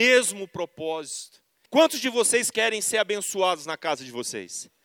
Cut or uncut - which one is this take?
cut